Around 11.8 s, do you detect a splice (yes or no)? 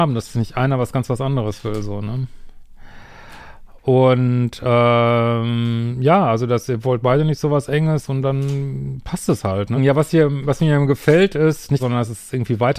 yes